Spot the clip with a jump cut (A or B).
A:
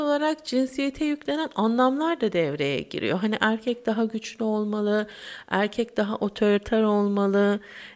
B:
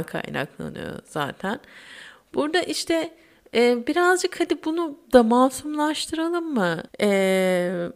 B